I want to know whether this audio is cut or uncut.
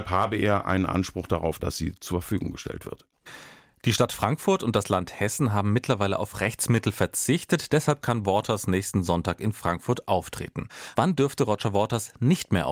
cut